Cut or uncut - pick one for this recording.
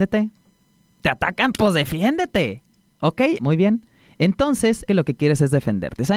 cut